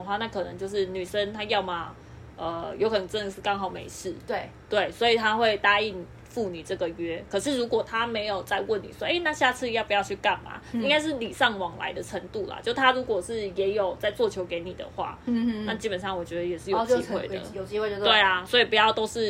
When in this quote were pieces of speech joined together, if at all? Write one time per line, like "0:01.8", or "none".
none

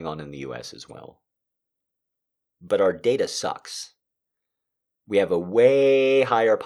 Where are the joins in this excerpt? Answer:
none

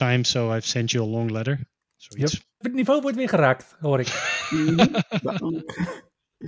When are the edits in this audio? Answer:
none

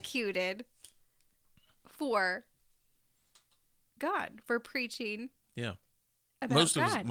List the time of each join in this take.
none

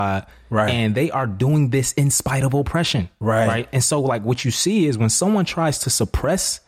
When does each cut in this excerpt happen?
none

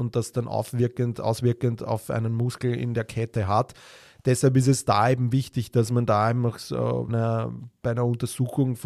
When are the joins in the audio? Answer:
0:07.1

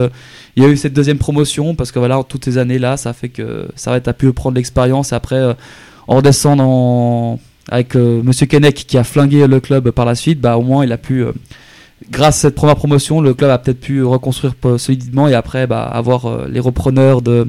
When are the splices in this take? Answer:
none

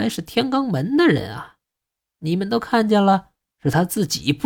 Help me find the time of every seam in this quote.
0:03.5

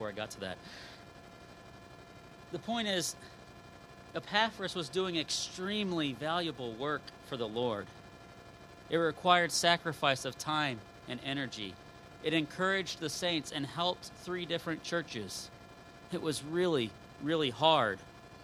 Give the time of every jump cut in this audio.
0:08.8

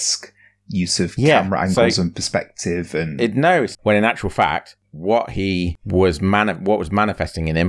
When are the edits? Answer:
0:03.7

